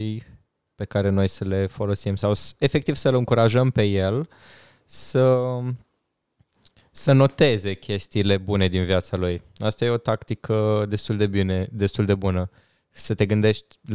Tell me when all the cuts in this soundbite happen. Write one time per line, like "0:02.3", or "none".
none